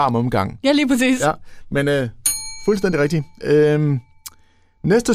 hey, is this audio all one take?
yes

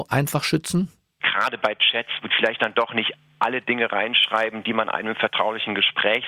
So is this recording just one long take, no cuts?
no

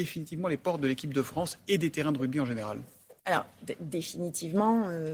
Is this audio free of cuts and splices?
no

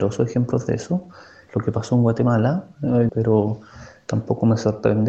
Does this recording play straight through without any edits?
no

